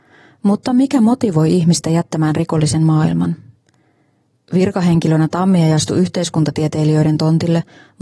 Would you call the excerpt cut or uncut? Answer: uncut